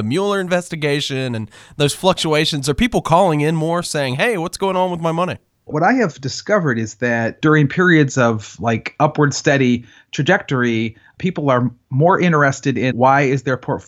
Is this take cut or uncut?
cut